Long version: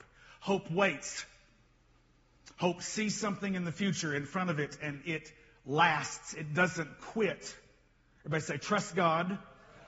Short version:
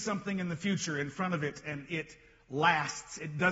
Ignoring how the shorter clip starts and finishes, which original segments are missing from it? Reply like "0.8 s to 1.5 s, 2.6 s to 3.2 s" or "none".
none